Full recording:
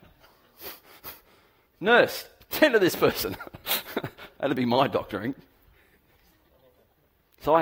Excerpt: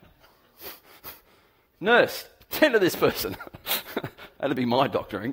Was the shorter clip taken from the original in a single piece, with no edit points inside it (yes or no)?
yes